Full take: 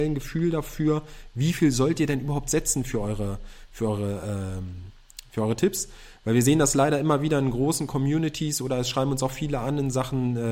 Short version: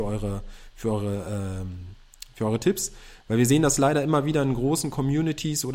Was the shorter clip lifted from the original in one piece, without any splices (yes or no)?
yes